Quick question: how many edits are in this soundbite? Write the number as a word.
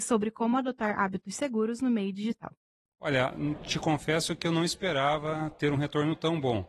zero